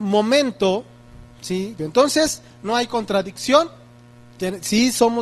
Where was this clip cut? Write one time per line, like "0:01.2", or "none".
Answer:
0:01.8